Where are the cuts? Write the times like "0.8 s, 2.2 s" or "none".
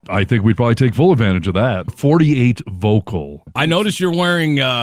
1.9 s